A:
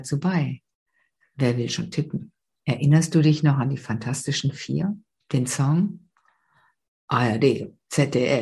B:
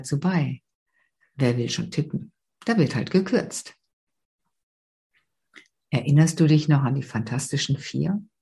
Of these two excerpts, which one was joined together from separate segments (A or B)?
A